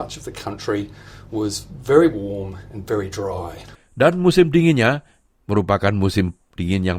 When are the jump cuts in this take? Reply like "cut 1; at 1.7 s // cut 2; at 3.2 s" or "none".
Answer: cut 1; at 3.7 s